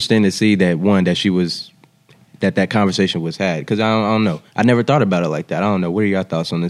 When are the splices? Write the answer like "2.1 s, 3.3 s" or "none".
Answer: none